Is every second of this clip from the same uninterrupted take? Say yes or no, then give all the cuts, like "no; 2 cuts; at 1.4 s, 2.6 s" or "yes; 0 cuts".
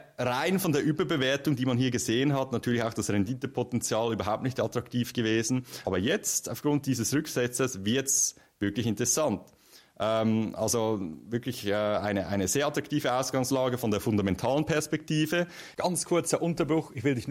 no; 1 cut; at 5.8 s